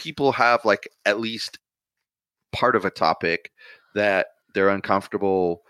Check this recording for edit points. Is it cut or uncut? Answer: uncut